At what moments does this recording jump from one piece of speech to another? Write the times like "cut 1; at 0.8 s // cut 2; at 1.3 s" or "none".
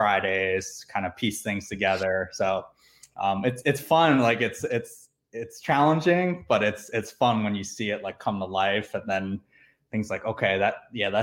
none